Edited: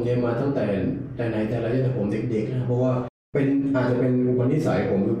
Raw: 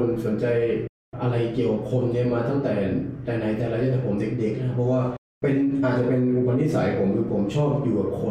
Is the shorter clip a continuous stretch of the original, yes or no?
yes